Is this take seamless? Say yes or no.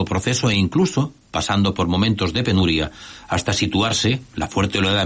yes